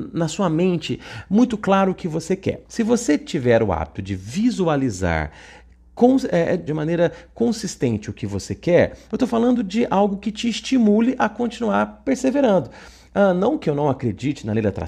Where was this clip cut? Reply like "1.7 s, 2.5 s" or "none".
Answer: 2.6 s, 6.7 s, 9.1 s